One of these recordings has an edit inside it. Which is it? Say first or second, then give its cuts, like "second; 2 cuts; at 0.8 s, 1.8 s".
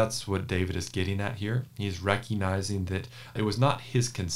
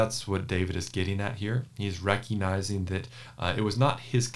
first; 1 cut; at 3.4 s